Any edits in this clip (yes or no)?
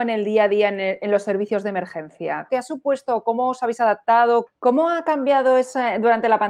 yes